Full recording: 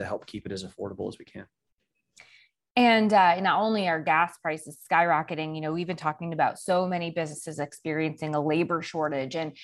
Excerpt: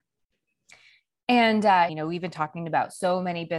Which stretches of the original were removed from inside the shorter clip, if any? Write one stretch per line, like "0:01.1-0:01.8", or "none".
0:03.4-0:05.5